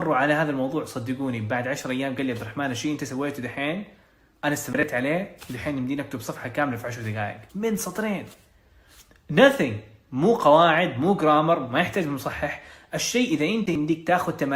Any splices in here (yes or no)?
yes